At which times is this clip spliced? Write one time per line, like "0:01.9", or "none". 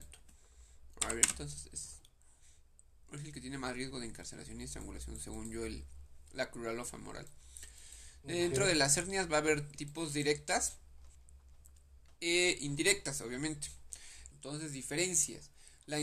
0:09.8
0:14.3

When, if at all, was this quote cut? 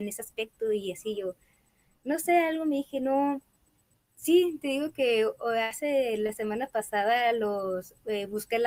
0:04.0

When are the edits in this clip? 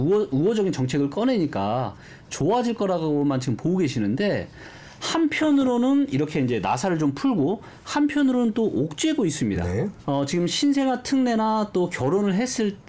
0:10.0

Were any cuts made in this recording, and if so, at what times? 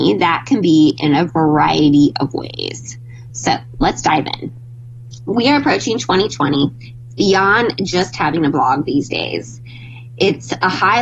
none

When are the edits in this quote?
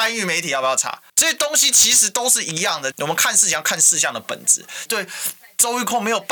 0:01.1
0:02.9
0:04.9

